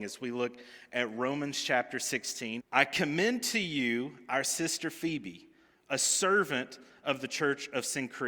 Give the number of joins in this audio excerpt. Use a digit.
1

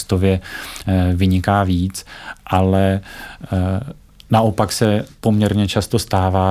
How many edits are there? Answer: 0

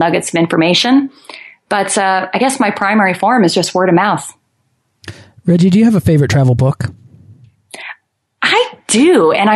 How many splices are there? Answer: 0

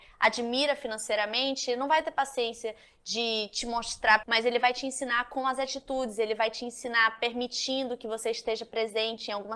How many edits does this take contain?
1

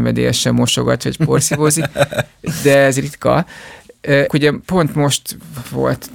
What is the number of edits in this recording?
1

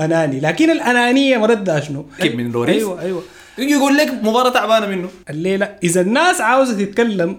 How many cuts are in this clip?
2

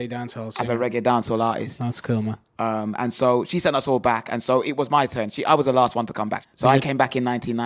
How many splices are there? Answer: 2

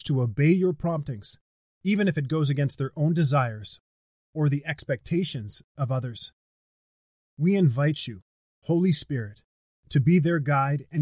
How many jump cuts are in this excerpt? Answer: 0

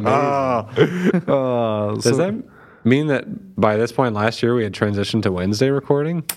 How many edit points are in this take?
0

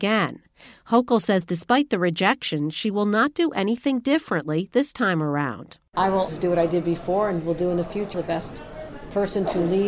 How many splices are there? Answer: 2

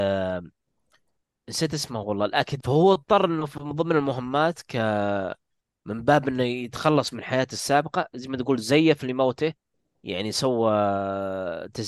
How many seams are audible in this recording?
1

